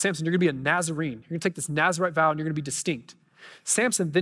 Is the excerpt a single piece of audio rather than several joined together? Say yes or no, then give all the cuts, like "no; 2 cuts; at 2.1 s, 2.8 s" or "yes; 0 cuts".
yes; 0 cuts